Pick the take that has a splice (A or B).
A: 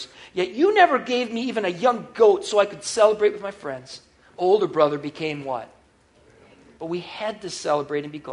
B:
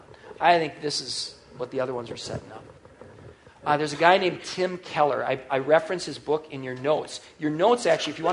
A